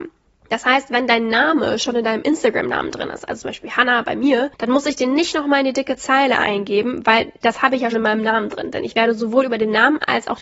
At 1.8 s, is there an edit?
no; 1 cut; at 7.9 s

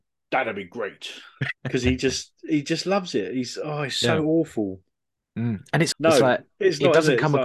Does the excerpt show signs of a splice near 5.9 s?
yes; 2 cuts; at 1.6 s, 5.9 s

